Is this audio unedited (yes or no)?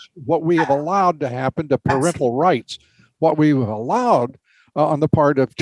yes